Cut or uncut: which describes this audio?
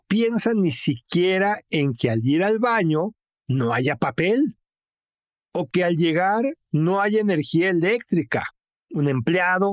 cut